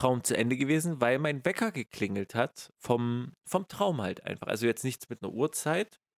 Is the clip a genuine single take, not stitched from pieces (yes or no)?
yes